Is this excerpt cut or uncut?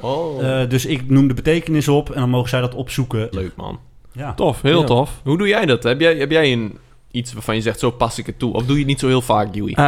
cut